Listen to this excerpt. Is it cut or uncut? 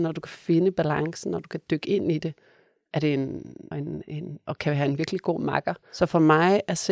cut